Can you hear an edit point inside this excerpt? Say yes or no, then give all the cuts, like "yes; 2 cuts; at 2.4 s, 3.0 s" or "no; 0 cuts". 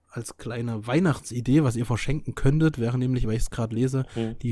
no; 0 cuts